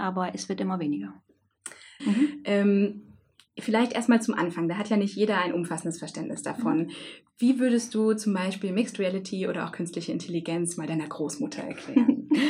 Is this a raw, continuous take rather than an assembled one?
no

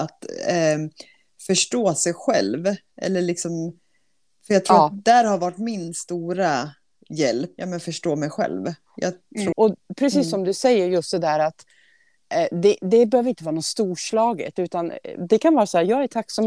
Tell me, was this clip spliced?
yes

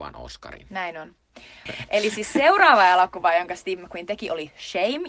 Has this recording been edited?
yes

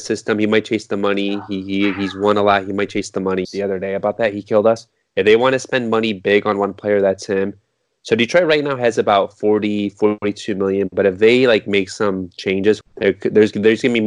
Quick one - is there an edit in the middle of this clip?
yes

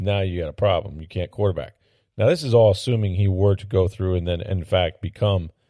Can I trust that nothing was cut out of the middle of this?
yes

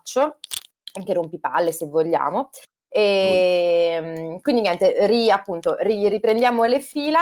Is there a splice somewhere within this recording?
no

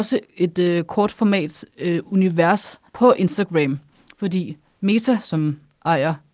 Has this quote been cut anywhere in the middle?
yes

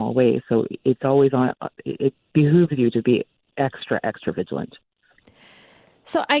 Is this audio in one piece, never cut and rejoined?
yes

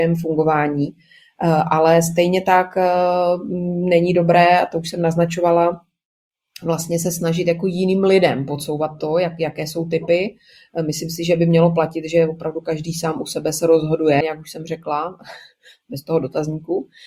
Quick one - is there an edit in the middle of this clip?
yes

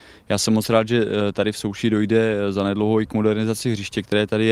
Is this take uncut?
yes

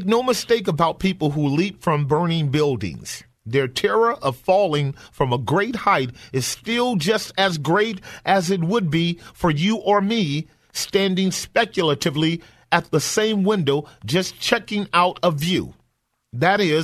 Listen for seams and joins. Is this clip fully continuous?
yes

